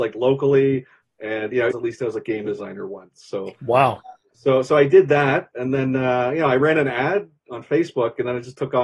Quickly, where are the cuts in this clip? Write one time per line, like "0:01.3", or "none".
0:01.7